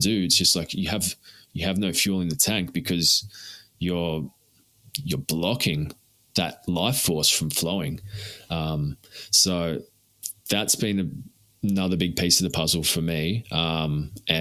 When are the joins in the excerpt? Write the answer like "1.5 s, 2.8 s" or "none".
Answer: none